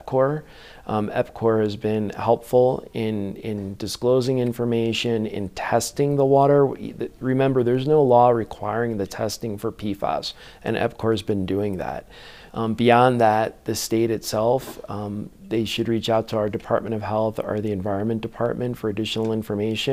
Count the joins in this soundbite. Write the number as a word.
zero